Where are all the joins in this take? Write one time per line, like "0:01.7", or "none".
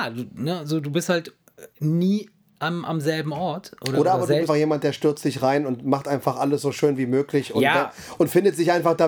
0:01.7
0:04.5